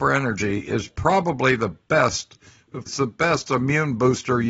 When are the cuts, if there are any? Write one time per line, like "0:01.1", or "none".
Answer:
0:02.9